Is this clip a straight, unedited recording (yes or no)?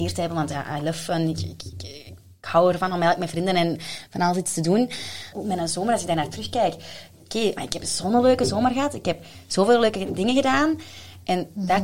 no